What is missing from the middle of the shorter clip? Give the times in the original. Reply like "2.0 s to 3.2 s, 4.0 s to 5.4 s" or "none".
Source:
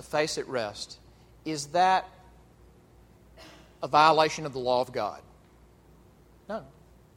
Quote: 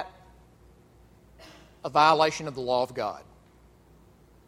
none